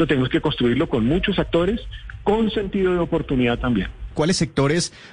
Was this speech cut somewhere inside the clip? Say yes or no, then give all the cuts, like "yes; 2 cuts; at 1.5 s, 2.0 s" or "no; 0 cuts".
yes; 1 cut; at 4.1 s